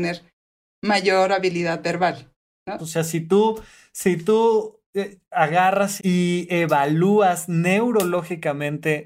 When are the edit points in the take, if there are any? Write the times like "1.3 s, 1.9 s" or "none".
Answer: 2.8 s, 6.0 s